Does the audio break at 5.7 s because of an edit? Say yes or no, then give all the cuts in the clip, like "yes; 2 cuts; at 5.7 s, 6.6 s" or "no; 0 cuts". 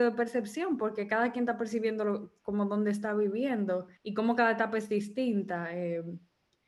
no; 1 cut; at 4.0 s